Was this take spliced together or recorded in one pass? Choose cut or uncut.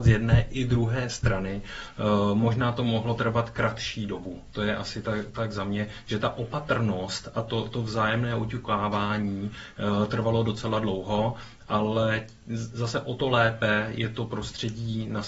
uncut